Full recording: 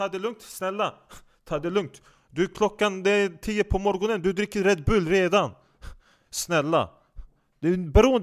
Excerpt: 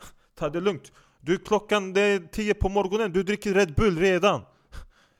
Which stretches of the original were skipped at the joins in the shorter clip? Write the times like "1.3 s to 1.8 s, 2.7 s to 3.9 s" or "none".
none